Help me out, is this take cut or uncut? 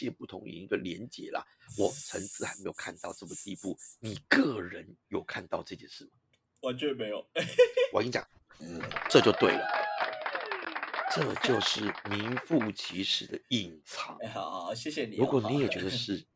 uncut